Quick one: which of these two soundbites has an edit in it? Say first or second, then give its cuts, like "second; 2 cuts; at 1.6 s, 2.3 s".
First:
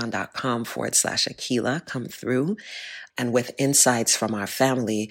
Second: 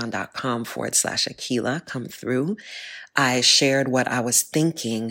first; 1 cut; at 3.1 s